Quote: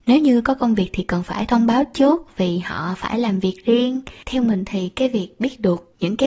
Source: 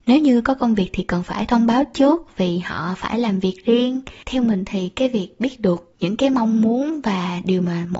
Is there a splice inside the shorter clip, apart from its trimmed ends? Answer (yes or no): no